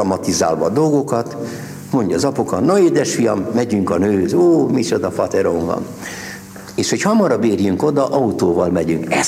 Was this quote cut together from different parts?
no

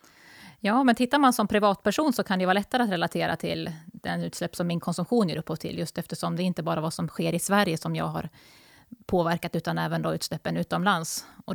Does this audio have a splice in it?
no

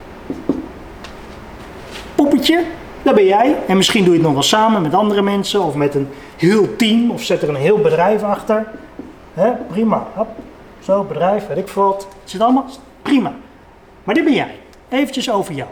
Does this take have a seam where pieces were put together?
no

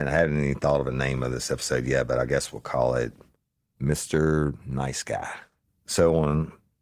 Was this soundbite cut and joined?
no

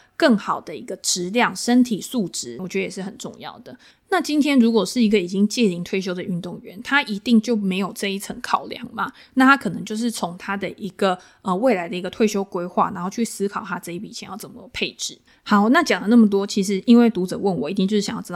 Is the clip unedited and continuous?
no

